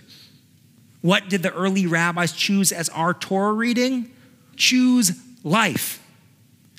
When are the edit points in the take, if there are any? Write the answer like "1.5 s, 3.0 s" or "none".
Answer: 4.5 s